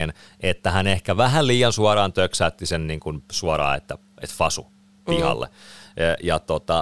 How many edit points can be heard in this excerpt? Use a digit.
0